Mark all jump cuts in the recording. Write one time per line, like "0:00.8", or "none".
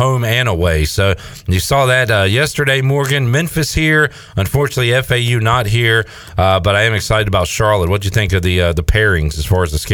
none